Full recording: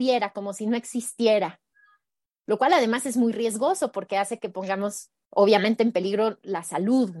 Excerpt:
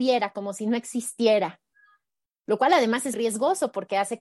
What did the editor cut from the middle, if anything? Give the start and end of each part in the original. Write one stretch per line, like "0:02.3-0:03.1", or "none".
0:03.1-0:03.3